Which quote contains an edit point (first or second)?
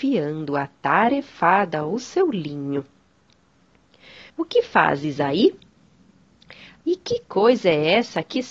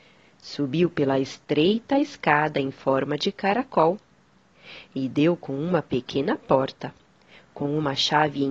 first